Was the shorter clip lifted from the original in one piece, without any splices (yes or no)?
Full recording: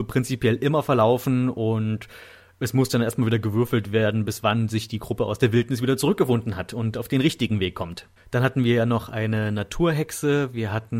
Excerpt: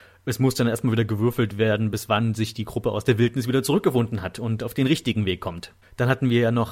yes